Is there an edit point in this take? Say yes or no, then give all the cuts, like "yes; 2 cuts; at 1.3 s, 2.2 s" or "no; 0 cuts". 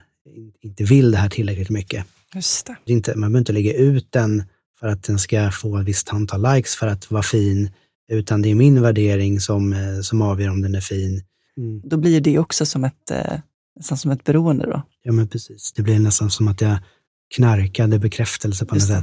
yes; 2 cuts; at 2.9 s, 11.5 s